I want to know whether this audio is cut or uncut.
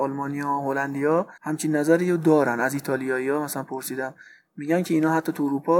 cut